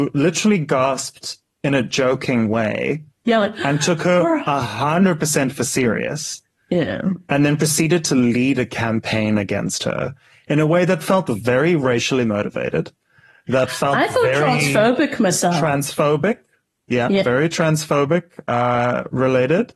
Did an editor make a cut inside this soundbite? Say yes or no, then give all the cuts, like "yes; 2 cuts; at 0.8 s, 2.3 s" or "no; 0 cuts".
no; 0 cuts